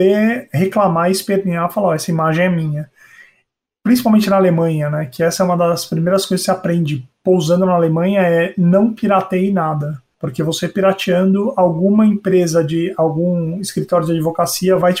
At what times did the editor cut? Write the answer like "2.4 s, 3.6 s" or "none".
none